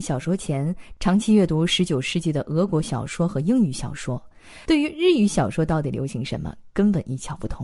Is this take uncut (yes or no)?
yes